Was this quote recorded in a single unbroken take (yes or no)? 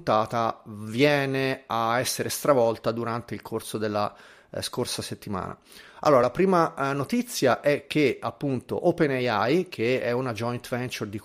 yes